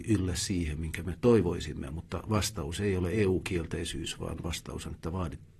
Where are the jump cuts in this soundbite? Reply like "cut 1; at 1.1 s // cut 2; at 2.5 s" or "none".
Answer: none